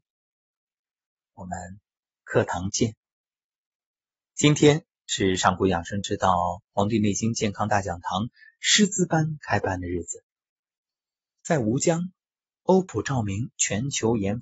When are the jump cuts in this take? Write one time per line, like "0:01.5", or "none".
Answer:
none